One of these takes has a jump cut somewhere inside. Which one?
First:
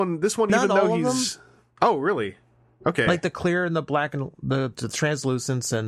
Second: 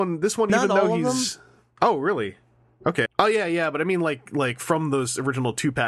second; 1 cut; at 3.1 s

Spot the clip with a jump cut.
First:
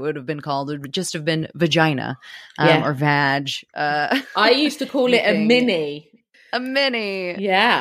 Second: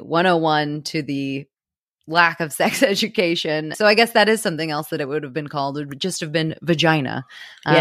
second; 1 cut; at 3.7 s

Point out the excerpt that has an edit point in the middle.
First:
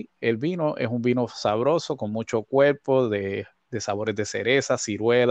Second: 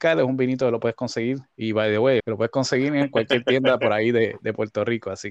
second; 1 cut; at 2.2 s

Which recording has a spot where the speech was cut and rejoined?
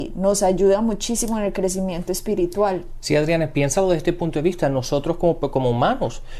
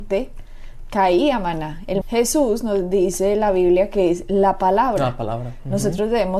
second; 1 cut; at 2.0 s

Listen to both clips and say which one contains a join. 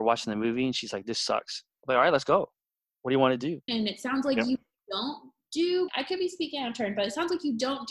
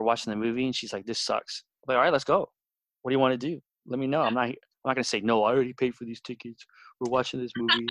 first; 2 cuts; at 3.7 s, 5.9 s

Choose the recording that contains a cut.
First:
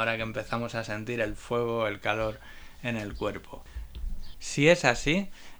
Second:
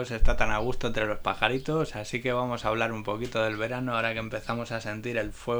first; 1 cut; at 4.3 s

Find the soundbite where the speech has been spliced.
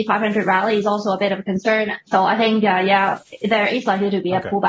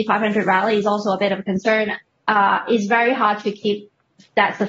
first; 1 cut; at 2.1 s

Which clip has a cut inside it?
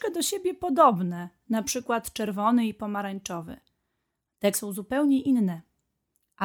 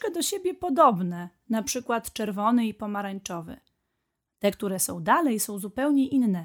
first; 1 cut; at 4.5 s

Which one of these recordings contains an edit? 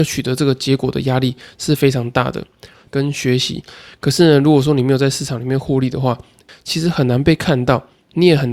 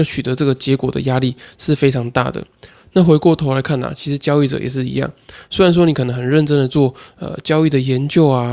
first; 2 cuts; at 2.9 s, 6.5 s

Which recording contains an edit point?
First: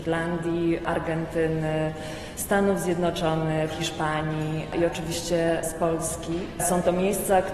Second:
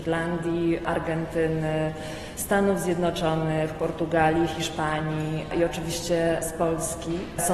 first; 1 cut; at 3.7 s

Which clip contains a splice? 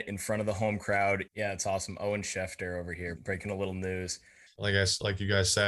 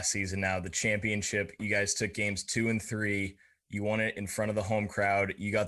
first; 3 cuts; at 1.3 s, 3.2 s, 4.5 s

